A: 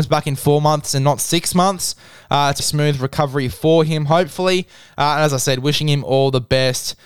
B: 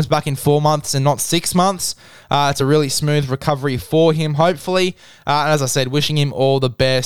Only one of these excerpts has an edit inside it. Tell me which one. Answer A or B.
A